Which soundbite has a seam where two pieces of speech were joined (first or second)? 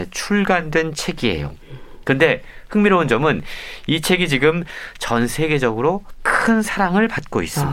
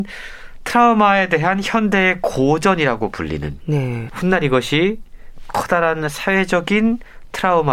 second